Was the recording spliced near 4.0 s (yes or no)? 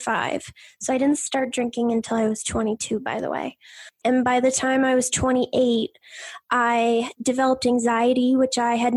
yes